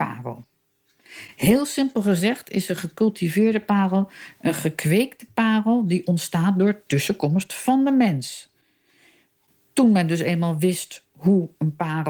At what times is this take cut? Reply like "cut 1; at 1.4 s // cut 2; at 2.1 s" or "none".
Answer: none